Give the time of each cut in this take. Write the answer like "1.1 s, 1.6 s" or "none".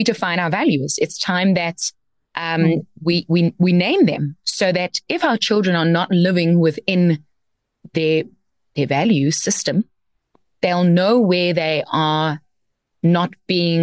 none

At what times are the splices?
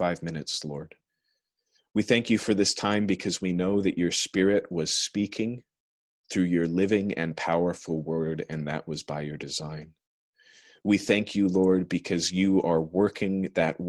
none

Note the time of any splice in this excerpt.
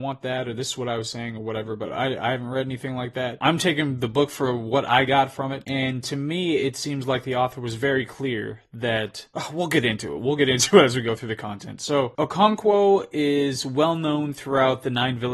none

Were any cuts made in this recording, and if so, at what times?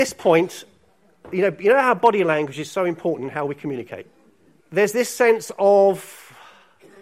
4.6 s

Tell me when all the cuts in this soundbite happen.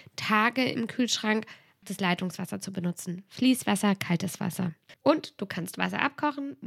1.8 s, 4.9 s

